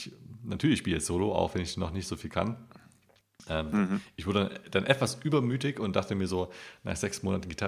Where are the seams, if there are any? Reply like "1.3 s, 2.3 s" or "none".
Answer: none

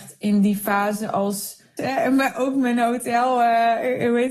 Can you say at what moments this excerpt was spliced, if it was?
1.8 s

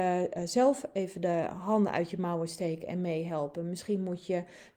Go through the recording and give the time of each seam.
none

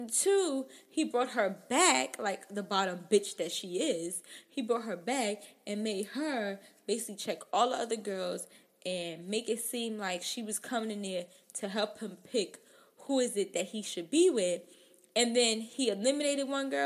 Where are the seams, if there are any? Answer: none

